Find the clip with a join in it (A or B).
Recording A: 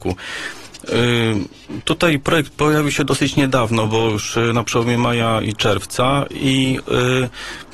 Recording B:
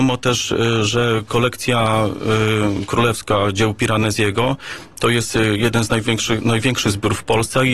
A